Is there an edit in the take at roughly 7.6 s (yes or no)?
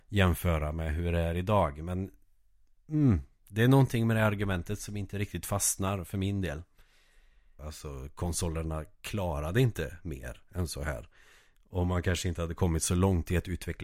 yes